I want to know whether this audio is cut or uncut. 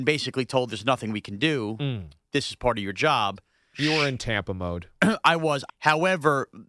cut